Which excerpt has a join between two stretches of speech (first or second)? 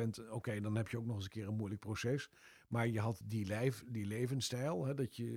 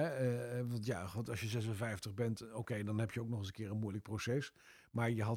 first